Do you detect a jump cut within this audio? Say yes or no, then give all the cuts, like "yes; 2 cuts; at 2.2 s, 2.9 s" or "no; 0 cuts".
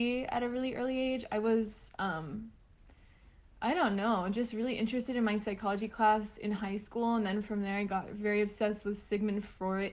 no; 0 cuts